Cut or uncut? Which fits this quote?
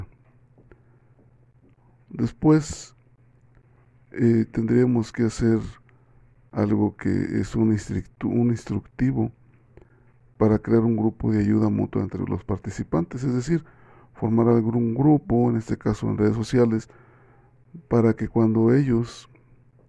uncut